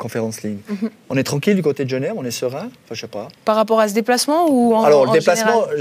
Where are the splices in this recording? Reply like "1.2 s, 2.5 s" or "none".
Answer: 3.4 s